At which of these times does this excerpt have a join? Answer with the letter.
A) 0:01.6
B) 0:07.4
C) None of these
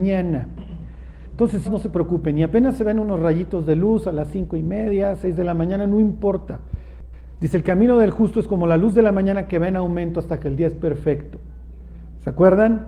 A